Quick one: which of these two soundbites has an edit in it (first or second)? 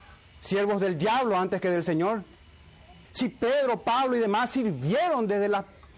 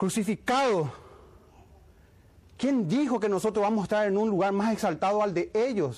first